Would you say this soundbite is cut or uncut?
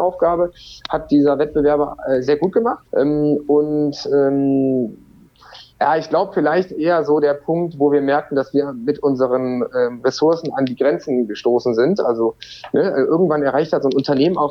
cut